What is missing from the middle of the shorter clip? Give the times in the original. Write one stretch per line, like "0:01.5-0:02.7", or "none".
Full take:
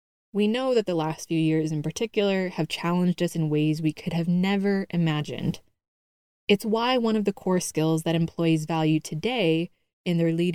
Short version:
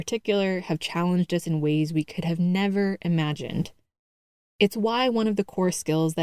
none